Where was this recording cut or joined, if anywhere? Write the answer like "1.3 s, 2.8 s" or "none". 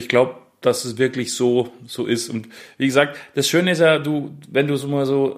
none